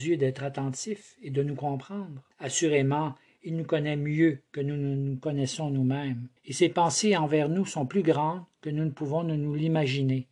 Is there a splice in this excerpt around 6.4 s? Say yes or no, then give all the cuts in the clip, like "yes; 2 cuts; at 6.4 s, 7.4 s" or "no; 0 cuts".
yes; 2 cuts; at 2.3 s, 6.4 s